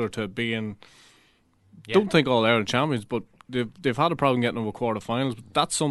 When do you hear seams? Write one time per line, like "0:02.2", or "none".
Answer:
none